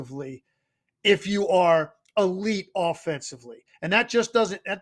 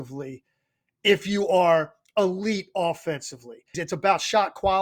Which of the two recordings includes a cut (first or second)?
second